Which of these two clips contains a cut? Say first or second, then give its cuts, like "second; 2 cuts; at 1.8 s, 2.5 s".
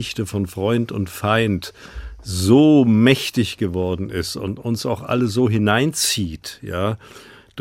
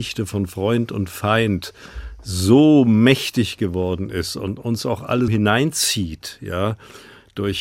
second; 1 cut; at 5.3 s